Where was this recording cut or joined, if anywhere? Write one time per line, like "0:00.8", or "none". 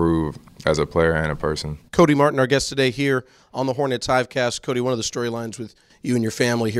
none